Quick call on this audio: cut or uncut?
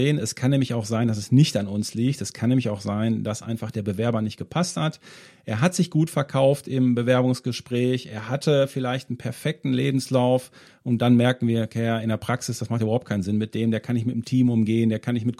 uncut